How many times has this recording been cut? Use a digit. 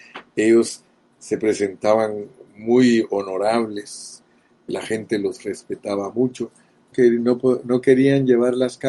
2